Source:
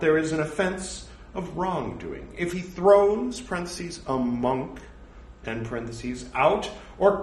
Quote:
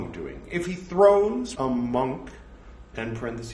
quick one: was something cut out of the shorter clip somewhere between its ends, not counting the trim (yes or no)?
yes